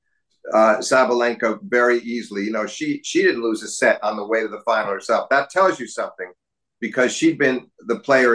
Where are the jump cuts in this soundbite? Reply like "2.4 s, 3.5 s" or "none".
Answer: none